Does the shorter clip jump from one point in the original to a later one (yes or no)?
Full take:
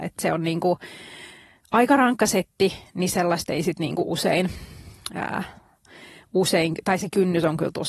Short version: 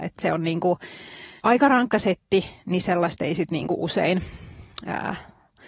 yes